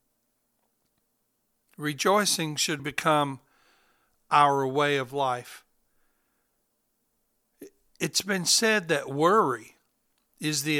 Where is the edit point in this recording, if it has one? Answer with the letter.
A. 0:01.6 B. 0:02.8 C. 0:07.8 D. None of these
B